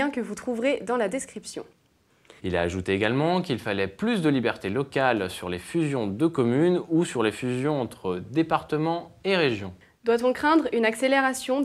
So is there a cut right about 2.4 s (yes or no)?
yes